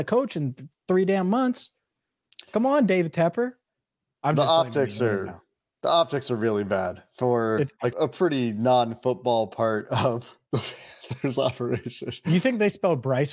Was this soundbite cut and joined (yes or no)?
yes